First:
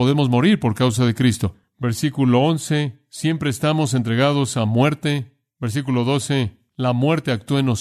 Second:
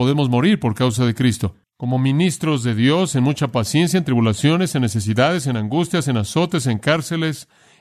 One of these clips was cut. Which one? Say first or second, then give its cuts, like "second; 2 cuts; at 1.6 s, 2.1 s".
second; 1 cut; at 1.6 s